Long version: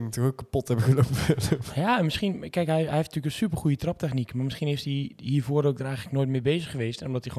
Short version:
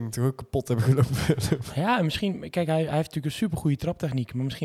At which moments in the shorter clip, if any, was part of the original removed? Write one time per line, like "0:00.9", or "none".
none